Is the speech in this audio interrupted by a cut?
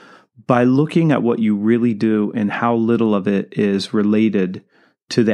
no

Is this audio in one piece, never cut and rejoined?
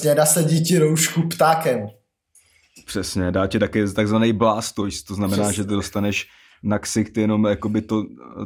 yes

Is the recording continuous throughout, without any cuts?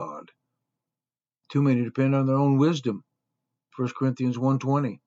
yes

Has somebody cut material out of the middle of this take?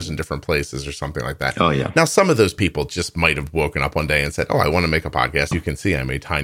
yes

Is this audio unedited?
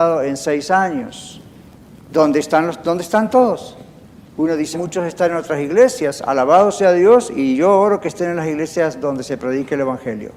no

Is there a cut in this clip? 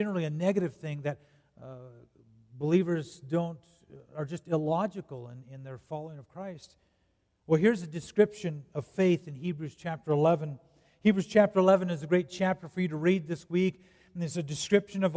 no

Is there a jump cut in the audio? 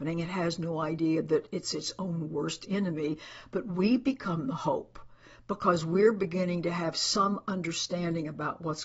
no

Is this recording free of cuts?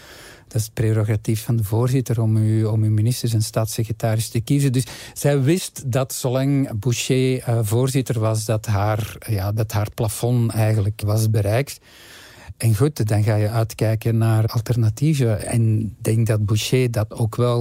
yes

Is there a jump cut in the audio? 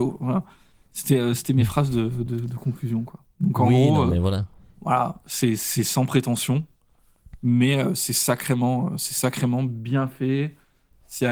no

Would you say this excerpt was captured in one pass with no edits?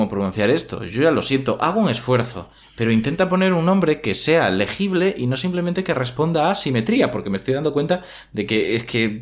yes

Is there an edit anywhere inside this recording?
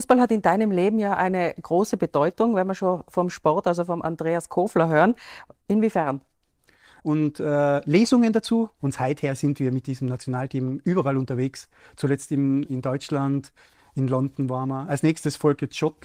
yes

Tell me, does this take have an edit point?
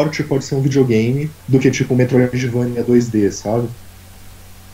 yes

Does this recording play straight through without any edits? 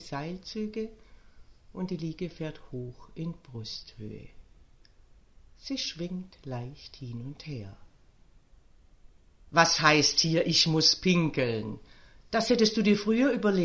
yes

